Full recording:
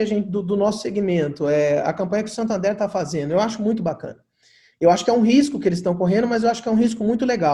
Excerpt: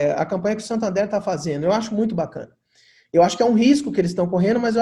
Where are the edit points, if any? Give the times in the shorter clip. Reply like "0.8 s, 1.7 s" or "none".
none